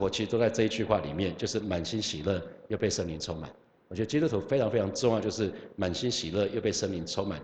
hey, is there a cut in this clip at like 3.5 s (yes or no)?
no